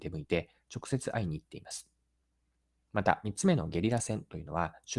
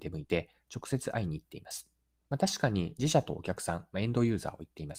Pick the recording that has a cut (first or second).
second